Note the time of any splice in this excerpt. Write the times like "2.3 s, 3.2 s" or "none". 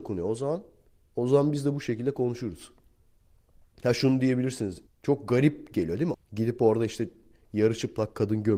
4.9 s, 6.1 s